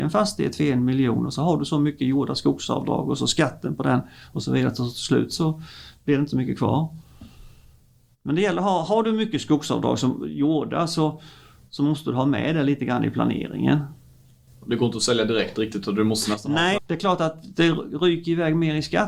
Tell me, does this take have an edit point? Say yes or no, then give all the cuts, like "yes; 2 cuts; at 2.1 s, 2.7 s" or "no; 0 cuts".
yes; 2 cuts; at 14.5 s, 16.8 s